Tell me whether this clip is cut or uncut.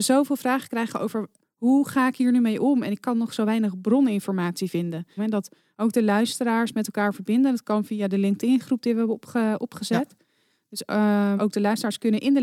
cut